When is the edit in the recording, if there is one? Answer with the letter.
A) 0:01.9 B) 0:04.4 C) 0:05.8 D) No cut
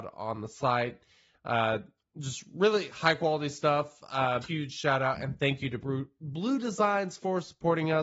B